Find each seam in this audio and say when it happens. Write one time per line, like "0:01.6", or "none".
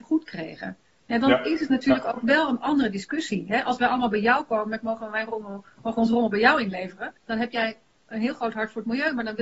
0:07.2